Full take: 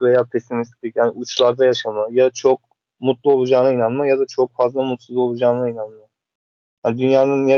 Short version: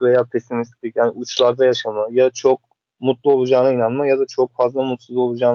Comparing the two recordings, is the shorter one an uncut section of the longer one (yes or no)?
yes